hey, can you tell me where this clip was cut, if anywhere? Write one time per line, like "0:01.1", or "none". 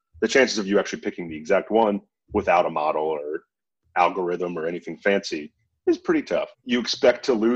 0:06.5